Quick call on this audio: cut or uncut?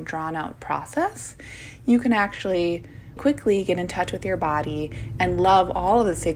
cut